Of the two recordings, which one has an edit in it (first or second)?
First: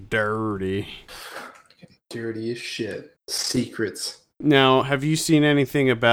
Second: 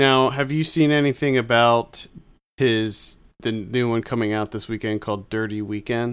first